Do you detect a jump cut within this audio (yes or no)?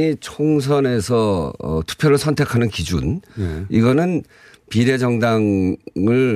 no